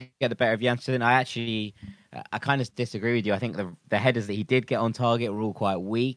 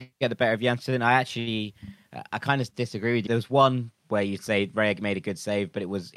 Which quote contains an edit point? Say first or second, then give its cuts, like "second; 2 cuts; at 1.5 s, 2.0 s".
second; 1 cut; at 3.3 s